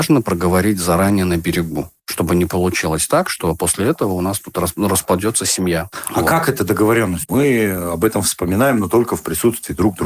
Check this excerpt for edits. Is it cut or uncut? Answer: uncut